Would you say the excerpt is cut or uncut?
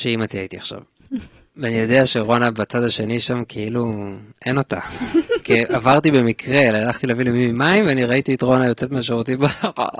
uncut